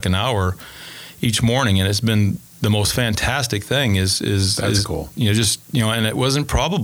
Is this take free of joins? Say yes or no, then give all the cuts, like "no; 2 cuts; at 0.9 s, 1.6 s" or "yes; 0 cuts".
yes; 0 cuts